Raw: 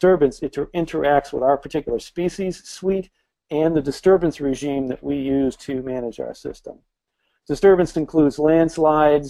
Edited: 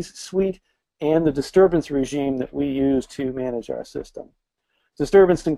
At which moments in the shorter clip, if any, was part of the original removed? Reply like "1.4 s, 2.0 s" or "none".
none